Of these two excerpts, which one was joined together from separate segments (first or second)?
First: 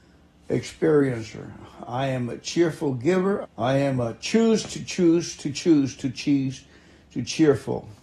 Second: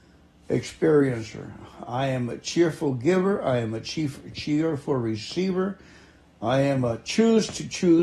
first